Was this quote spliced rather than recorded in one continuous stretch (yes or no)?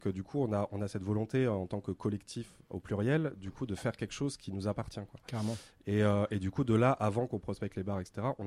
no